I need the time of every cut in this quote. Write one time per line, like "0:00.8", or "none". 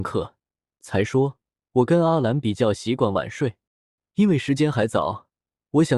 none